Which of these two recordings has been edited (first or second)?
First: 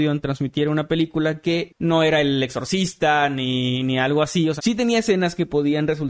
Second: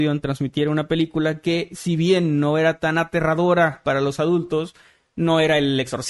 first